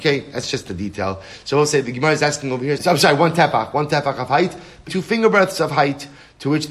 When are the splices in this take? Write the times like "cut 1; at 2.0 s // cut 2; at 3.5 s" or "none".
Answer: cut 1; at 2.8 s // cut 2; at 4.9 s

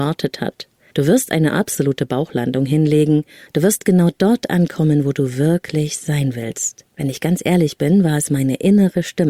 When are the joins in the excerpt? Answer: cut 1; at 3.5 s // cut 2; at 6.9 s

